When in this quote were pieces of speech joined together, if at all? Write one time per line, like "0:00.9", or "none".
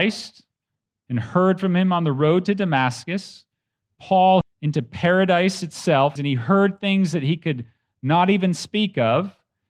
0:04.4
0:06.2